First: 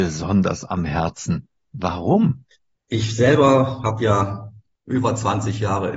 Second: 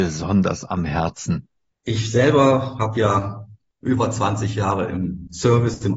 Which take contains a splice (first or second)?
second